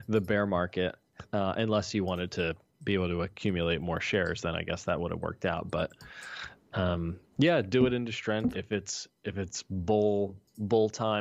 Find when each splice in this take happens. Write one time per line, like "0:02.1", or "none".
0:08.5